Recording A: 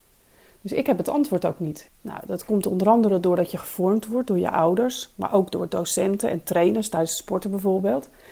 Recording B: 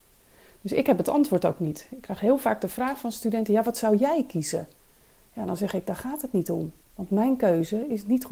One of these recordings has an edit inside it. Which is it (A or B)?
A